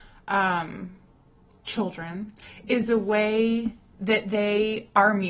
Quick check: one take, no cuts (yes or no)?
yes